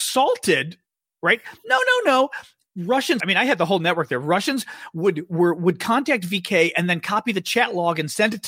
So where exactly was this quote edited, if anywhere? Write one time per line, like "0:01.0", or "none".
0:03.2